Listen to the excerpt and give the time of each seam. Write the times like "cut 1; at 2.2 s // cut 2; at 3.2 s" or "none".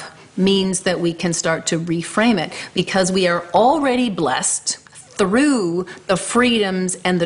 cut 1; at 4.9 s